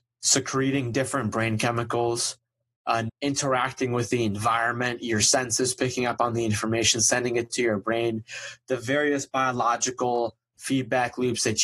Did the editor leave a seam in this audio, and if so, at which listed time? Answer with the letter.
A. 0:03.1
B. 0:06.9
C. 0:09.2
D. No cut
A